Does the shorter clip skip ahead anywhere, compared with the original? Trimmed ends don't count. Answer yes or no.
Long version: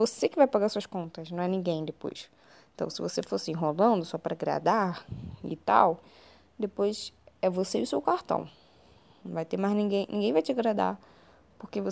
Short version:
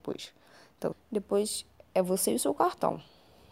yes